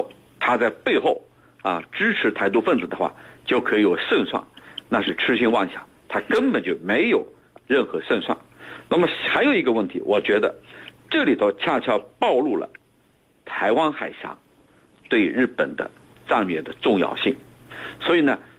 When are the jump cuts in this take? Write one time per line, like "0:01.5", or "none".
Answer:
none